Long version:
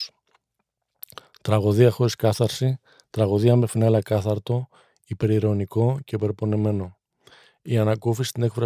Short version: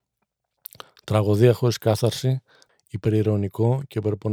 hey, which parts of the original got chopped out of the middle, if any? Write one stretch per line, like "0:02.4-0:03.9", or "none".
0:03.1-0:04.9